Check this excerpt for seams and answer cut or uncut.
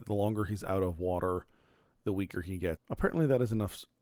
cut